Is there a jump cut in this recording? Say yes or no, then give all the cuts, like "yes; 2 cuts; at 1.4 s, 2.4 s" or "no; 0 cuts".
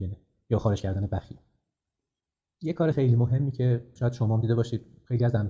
yes; 1 cut; at 2.9 s